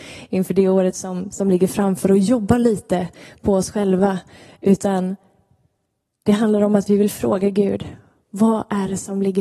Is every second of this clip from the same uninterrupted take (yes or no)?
yes